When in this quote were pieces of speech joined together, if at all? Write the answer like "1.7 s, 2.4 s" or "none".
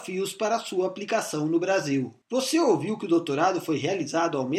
2.2 s